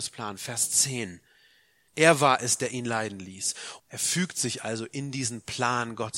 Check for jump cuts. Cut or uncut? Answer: cut